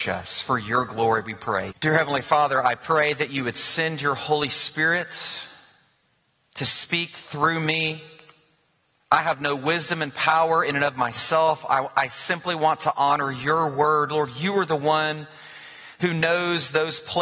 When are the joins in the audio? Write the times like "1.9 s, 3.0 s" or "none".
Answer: 1.7 s